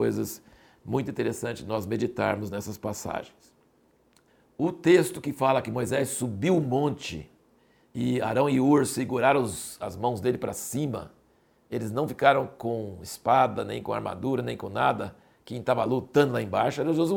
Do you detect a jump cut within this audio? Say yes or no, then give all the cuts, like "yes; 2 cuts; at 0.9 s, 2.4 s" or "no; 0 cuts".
no; 0 cuts